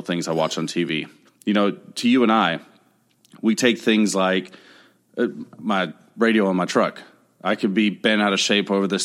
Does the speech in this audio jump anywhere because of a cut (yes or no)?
yes